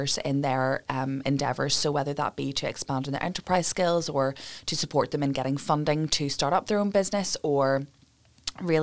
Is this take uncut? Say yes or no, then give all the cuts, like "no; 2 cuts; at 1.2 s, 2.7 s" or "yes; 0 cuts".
yes; 0 cuts